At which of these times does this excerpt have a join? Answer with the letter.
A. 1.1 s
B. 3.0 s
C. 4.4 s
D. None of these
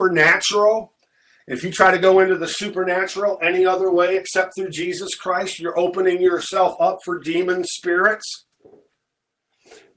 D